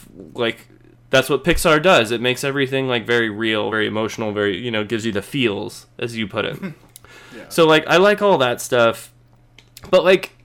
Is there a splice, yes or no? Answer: no